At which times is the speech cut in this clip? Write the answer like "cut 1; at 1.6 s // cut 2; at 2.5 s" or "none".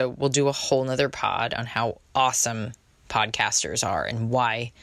none